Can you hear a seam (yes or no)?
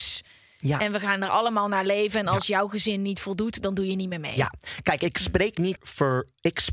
yes